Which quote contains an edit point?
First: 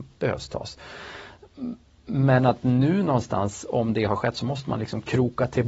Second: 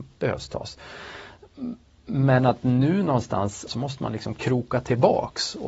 second; 1 cut; at 3.7 s

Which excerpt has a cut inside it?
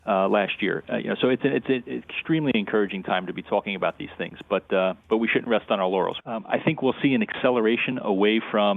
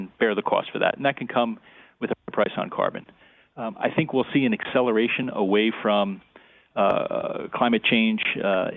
first; 1 cut; at 6.2 s

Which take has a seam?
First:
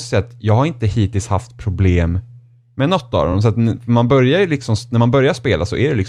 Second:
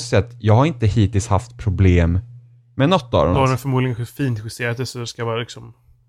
second; 1 cut; at 3.3 s

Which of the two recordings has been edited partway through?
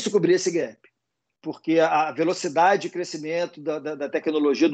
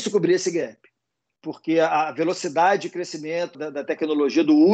second; 1 cut; at 3.5 s

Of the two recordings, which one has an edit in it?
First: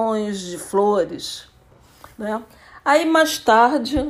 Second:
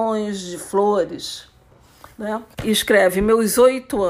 second; 1 cut; at 2.5 s

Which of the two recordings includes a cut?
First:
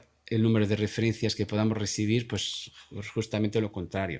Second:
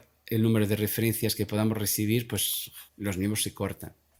second; 1 cut; at 2.9 s

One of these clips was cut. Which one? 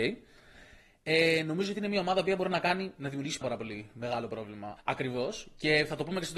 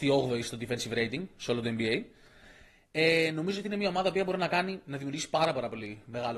first; 2 cuts; at 3.4 s, 4.8 s

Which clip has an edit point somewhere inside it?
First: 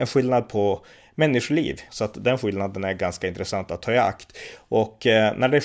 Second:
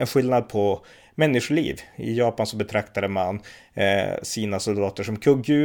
first; 2 cuts; at 1.9 s, 4.6 s

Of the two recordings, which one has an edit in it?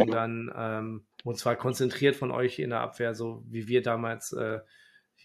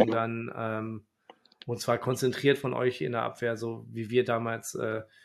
first; 1 cut; at 1.1 s

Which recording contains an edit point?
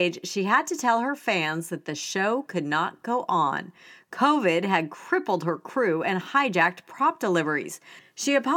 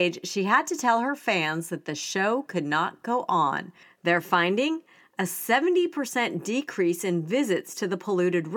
second; 1 cut; at 3.8 s

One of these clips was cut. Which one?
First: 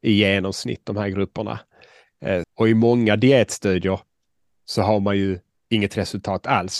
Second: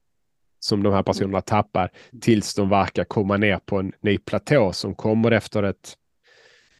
first; 1 cut; at 2.4 s

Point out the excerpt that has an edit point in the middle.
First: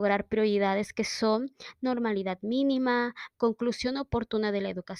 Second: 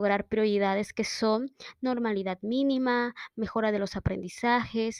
first; 1 cut; at 3.3 s

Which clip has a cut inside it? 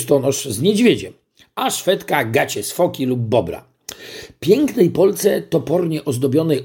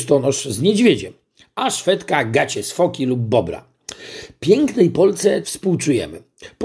second; 1 cut; at 5.4 s

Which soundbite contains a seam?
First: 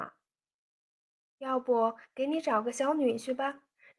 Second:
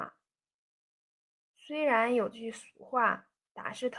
first; 1 cut; at 1.2 s

